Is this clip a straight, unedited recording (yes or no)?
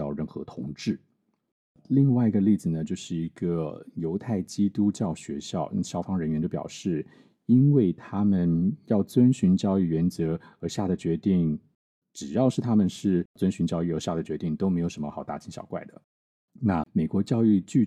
yes